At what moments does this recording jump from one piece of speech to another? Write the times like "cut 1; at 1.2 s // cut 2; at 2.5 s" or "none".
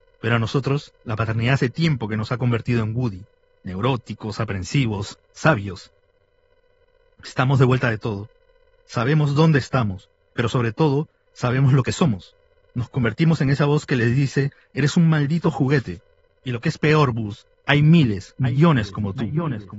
cut 1; at 12.7 s